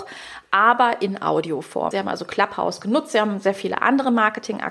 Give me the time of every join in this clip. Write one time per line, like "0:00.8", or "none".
0:01.9